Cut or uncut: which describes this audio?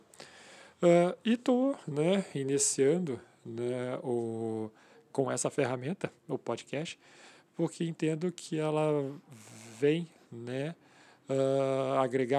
uncut